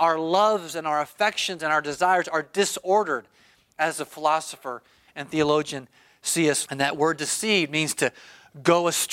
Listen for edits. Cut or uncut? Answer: cut